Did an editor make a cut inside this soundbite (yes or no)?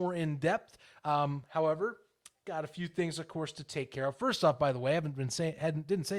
no